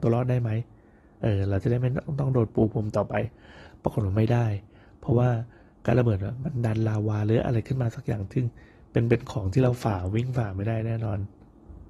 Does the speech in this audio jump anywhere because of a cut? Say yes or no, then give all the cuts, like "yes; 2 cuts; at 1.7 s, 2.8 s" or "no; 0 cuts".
no; 0 cuts